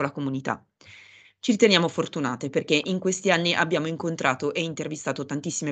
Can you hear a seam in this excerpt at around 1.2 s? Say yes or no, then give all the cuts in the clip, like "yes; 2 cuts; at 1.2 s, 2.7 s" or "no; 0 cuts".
yes; 1 cut; at 1.2 s